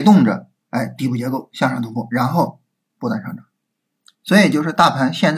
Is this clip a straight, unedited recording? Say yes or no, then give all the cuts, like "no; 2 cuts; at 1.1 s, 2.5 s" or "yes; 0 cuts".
yes; 0 cuts